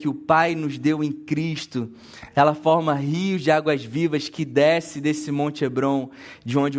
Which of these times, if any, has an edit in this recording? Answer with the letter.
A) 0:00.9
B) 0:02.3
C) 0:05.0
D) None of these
D